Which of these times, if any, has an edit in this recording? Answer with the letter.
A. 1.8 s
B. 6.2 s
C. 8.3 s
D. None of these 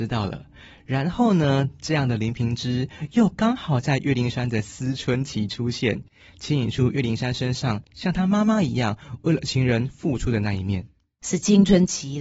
D